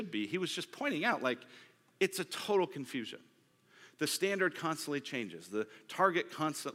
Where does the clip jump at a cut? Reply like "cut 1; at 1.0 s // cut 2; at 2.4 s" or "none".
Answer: none